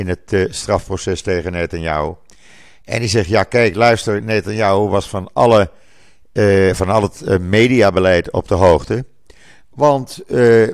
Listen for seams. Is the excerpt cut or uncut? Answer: uncut